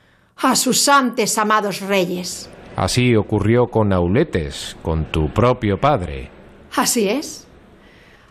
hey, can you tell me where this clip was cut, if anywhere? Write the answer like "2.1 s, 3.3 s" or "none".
none